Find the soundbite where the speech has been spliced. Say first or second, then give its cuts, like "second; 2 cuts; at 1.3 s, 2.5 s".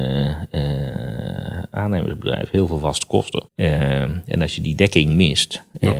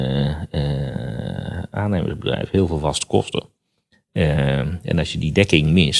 first; 1 cut; at 3.5 s